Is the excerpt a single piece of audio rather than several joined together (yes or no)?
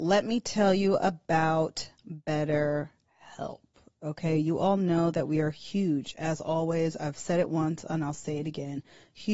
yes